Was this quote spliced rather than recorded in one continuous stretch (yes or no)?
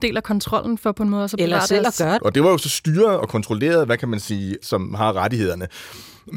yes